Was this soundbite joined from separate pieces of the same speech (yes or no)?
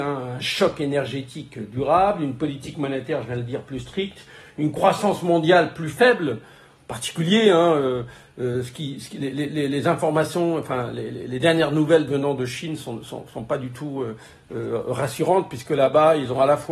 no